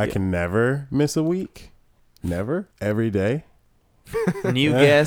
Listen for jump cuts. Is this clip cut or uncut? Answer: cut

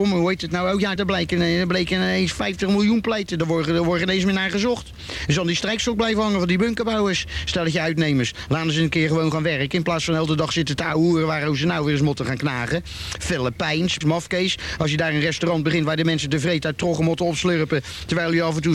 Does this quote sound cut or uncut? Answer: cut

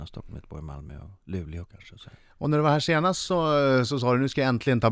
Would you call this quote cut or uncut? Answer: uncut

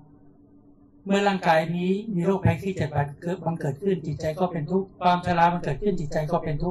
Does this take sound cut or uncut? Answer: cut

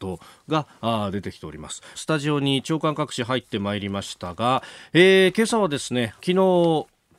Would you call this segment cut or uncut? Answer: cut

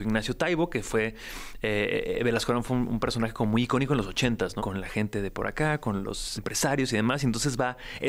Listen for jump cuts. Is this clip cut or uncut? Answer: cut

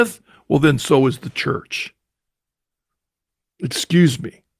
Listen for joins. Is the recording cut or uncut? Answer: uncut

